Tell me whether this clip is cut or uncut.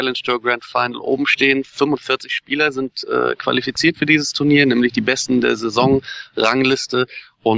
uncut